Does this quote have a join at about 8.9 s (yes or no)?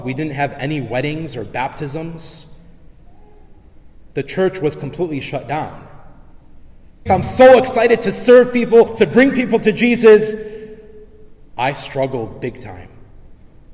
yes